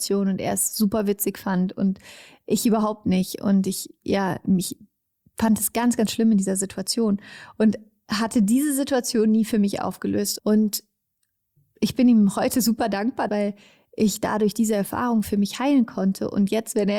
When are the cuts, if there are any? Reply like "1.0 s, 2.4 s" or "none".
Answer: 10.4 s, 13.3 s